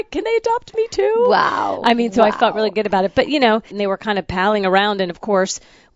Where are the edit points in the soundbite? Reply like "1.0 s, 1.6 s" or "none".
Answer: 3.7 s